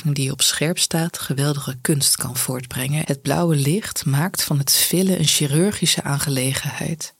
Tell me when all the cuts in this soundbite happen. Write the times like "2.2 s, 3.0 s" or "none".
3.0 s